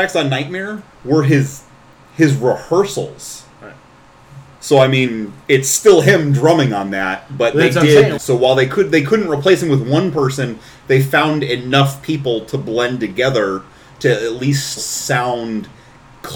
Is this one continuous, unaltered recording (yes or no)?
no